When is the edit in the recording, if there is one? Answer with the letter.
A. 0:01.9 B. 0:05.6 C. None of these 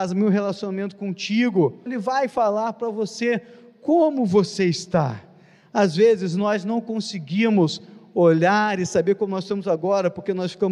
A